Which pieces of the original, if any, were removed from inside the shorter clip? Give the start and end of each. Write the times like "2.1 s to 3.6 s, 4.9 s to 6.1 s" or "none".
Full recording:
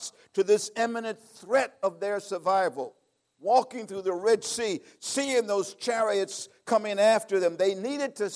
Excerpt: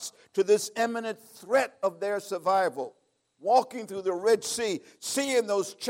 none